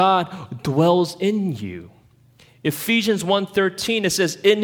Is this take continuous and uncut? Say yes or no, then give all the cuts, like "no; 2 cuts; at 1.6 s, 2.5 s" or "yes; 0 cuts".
yes; 0 cuts